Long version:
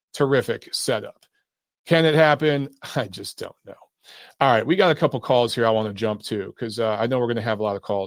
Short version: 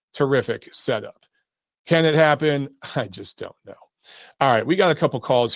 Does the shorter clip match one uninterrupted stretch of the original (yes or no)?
yes